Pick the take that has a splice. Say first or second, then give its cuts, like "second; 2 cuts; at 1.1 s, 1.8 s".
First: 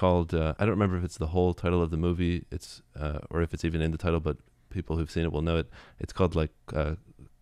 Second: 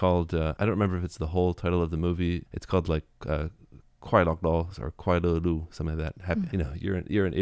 second; 2 cuts; at 2.5 s, 6.5 s